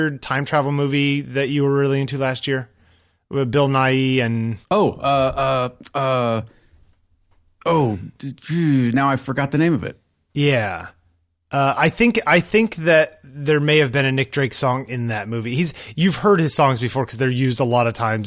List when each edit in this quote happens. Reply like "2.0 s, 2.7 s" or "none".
4.6 s